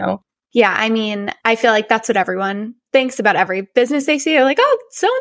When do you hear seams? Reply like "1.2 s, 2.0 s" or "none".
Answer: none